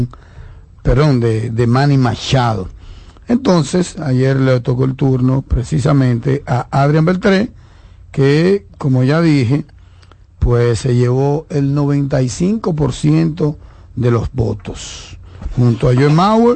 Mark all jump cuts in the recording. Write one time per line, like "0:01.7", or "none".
none